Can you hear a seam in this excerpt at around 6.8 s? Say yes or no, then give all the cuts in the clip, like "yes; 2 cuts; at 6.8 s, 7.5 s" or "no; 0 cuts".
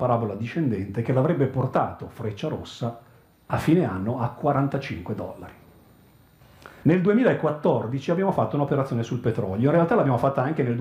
yes; 1 cut; at 6.8 s